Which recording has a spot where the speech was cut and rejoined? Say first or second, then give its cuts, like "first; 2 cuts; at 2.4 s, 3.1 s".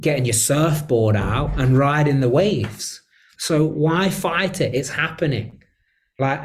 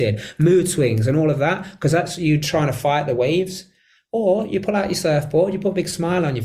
first; 1 cut; at 3.3 s